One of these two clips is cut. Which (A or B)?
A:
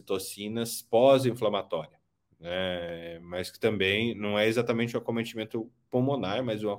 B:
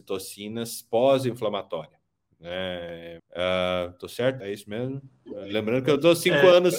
B